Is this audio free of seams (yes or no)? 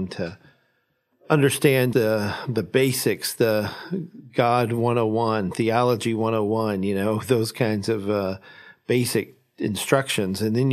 no